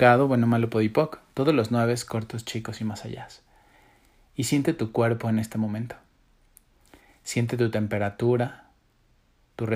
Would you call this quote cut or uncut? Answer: uncut